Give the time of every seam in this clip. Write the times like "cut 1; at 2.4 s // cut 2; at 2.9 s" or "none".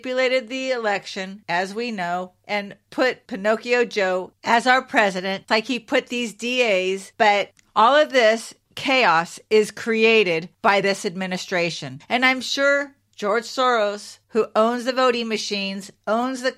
cut 1; at 5.5 s // cut 2; at 7.1 s